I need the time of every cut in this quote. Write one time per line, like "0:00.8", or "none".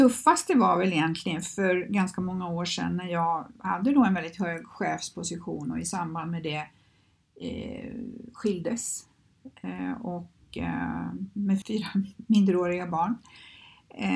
0:11.6